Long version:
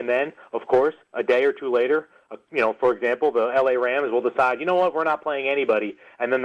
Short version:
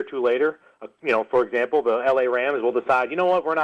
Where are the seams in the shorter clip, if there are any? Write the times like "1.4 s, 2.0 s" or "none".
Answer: none